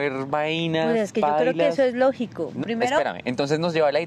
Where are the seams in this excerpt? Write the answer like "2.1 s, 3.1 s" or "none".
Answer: 2.6 s